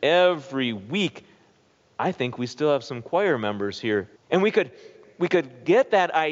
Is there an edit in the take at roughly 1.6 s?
no; 1 cut; at 4.2 s

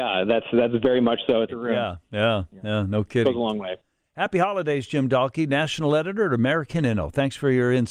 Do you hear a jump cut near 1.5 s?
yes; 1 cut; at 1.5 s

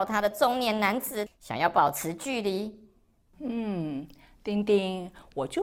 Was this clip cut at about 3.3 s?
yes; 2 cuts; at 1.3 s, 3.3 s

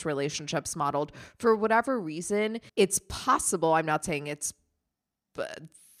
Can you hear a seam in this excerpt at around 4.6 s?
no; 1 cut; at 2.7 s

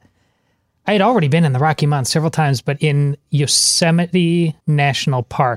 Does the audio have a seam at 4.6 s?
yes; 1 cut; at 4.6 s

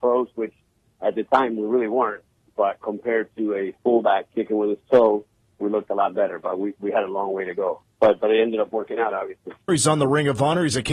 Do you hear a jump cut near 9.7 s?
yes; 1 cut; at 9.7 s

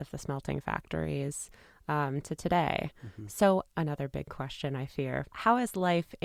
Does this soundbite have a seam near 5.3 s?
yes; 1 cut; at 5.3 s

